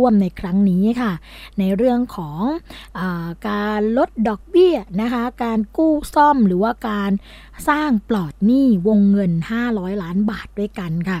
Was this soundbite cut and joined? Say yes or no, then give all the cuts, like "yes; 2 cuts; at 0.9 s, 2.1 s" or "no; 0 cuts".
no; 0 cuts